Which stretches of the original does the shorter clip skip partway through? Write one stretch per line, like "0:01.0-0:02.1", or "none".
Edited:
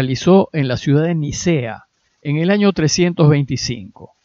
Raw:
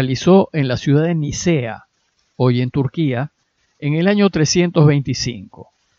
0:02.0-0:03.6